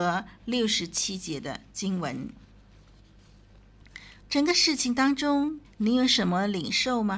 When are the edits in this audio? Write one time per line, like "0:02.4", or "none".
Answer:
0:04.2
0:05.6

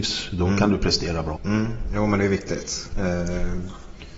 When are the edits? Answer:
0:01.4
0:02.9

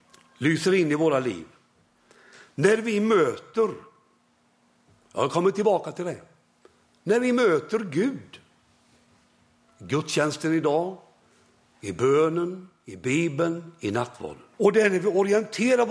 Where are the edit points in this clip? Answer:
0:14.5

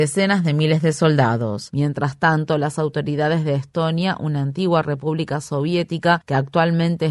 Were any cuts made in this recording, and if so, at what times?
0:01.7

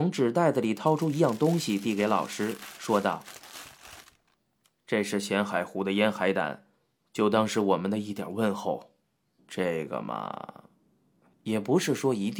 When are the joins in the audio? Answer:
0:09.4

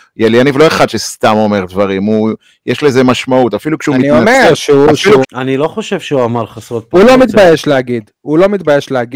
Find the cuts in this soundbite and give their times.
0:05.2

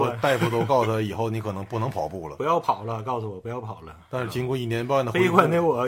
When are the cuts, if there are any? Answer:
none

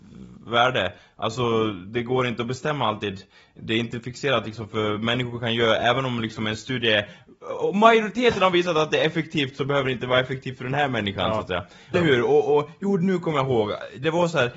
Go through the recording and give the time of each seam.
0:11.9

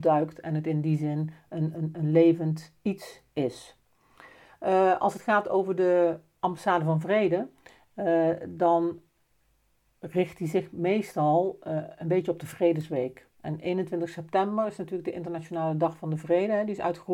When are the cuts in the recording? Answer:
none

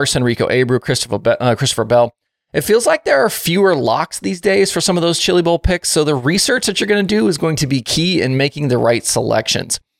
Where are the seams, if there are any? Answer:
none

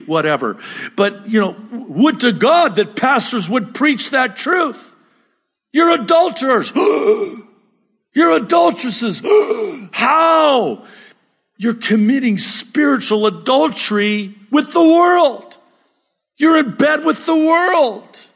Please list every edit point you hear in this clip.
none

